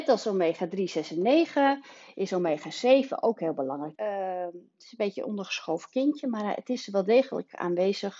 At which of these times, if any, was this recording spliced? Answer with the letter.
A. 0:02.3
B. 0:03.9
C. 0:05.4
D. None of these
B